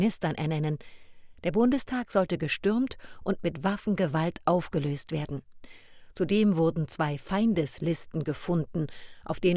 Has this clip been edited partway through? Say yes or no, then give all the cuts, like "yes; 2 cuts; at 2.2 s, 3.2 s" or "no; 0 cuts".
no; 0 cuts